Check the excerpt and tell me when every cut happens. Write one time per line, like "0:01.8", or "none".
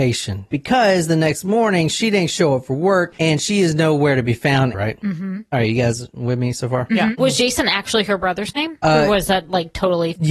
0:03.1
0:04.7